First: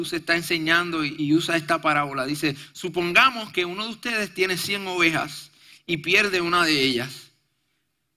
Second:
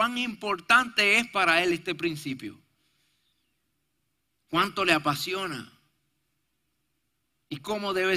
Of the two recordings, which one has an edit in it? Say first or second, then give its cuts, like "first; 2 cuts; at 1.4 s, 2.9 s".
first; 1 cut; at 1.2 s